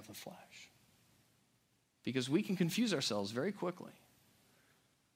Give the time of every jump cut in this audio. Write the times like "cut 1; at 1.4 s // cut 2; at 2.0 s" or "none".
cut 1; at 1.9 s